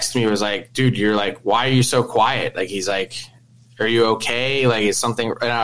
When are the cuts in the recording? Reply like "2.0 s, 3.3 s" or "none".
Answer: none

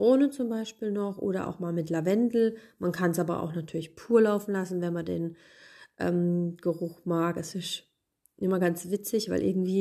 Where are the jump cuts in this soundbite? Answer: none

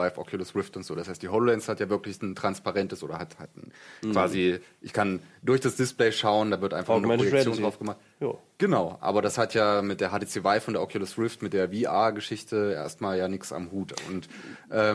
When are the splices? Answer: none

